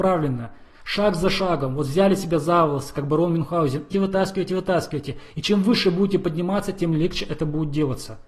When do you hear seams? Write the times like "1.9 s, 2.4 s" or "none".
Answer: 3.9 s